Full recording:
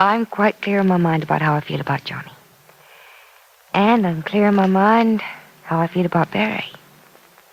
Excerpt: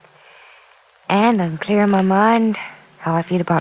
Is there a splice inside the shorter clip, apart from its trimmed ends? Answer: no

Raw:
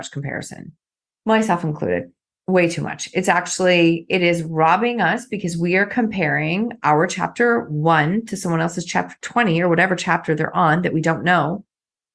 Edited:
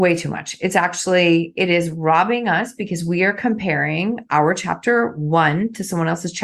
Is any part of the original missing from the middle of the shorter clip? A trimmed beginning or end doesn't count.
no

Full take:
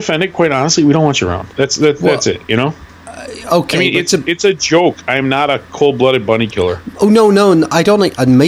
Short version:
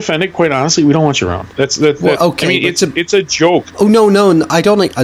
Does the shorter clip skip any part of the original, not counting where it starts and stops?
yes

